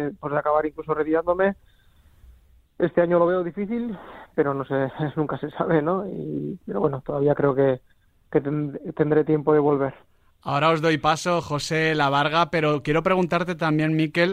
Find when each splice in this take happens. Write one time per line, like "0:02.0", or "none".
none